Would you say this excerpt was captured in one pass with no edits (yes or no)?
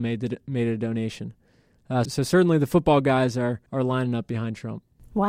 no